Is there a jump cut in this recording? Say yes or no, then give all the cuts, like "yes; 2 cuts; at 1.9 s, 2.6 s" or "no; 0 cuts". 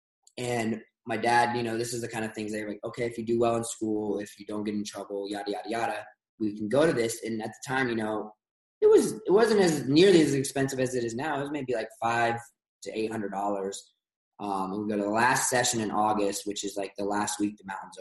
no; 0 cuts